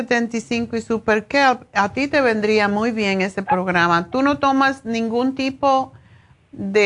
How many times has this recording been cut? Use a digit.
0